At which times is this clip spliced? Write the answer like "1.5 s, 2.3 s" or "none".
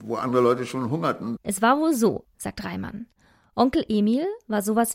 1.4 s